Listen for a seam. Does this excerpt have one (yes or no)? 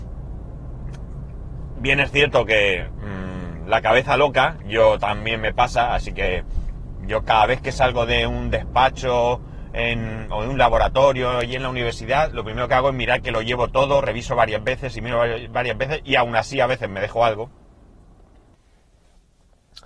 no